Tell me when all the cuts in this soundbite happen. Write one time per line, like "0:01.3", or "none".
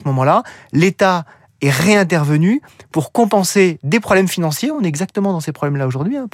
none